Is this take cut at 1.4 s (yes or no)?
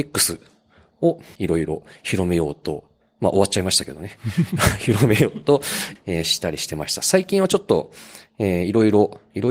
yes